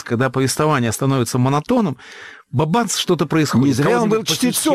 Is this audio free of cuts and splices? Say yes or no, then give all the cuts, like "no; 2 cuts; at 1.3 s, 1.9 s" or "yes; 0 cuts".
yes; 0 cuts